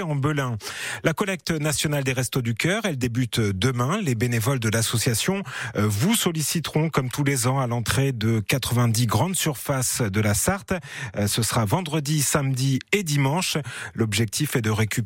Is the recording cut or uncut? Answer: uncut